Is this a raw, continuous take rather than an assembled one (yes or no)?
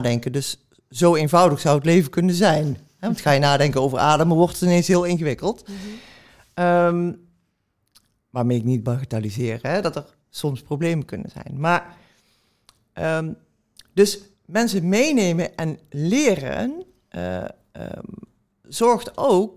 no